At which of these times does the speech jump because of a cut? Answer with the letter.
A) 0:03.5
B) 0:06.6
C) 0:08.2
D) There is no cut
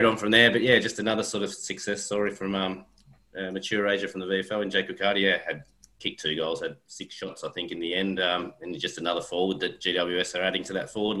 D